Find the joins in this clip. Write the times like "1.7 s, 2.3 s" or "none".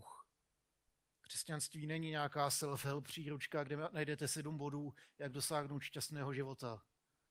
1.2 s